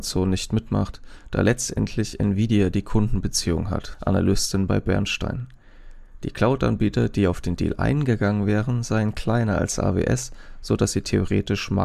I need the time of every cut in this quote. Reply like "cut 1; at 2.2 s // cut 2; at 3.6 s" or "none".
cut 1; at 3.9 s